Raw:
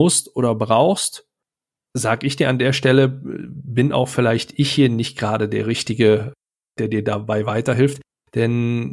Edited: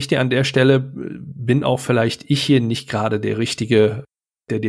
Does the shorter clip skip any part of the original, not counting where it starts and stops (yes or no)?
no